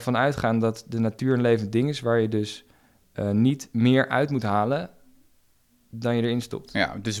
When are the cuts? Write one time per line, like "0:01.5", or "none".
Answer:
none